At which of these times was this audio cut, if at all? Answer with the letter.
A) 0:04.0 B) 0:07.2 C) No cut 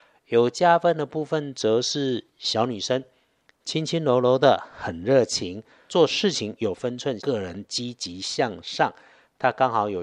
B